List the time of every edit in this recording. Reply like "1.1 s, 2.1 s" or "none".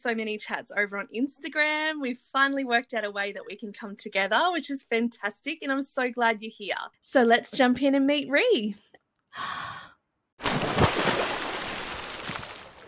6.9 s, 9.0 s